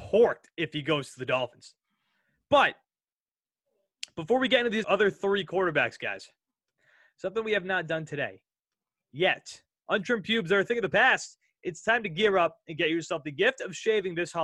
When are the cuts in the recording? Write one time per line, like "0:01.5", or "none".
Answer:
0:04.8
0:09.8